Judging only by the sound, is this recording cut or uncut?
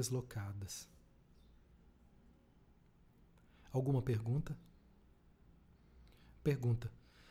uncut